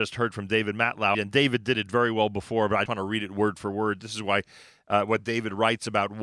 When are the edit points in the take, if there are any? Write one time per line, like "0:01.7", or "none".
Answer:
0:01.1
0:02.9